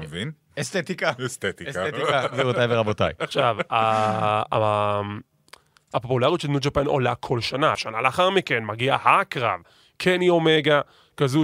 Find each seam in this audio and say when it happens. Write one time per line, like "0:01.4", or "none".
0:07.7